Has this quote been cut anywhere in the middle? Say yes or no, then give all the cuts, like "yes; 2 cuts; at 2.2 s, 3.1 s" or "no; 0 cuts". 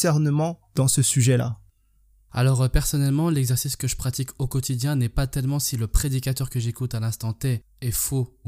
no; 0 cuts